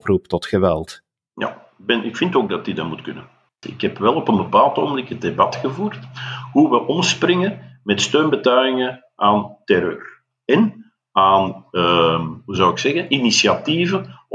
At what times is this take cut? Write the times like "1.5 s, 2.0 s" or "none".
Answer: 3.6 s